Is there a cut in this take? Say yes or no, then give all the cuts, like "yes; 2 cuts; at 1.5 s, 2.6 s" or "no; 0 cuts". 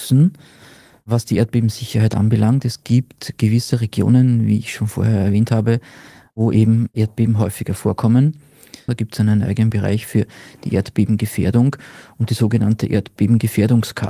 yes; 1 cut; at 8.9 s